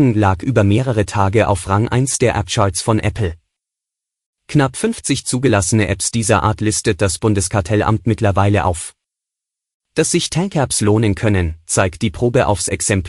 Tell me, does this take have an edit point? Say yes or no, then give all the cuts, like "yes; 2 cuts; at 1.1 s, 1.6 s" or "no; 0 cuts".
no; 0 cuts